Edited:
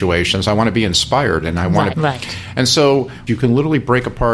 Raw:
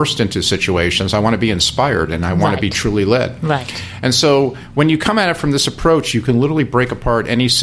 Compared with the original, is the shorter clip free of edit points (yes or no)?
no